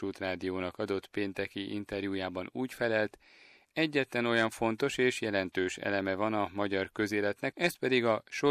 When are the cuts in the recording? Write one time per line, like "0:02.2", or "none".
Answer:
0:07.5